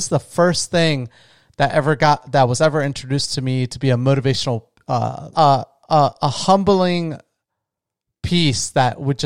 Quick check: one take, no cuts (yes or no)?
no